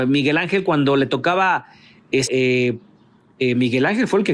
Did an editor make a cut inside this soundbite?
yes; 1 cut; at 2.3 s

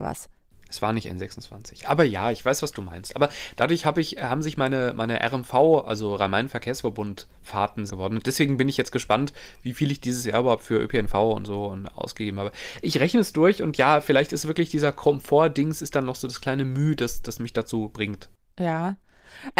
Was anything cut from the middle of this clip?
yes; 1 cut; at 7.9 s

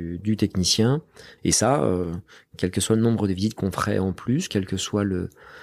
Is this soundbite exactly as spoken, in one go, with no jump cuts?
no; 2 cuts; at 1.4 s, 4.5 s

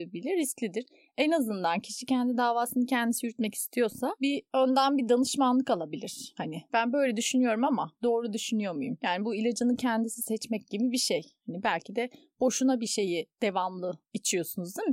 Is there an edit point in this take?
no; 0 cuts

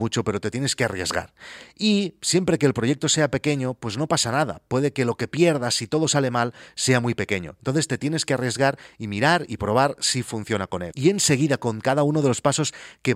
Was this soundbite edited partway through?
no; 0 cuts

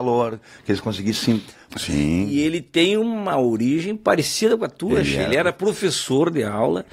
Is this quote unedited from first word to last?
no; 1 cut; at 1.7 s

